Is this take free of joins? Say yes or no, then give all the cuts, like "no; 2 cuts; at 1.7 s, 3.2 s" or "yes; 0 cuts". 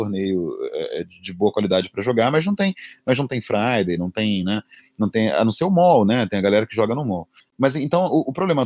yes; 0 cuts